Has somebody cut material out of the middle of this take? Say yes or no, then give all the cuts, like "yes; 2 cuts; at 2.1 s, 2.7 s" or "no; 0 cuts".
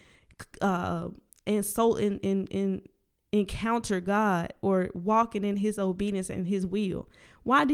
no; 0 cuts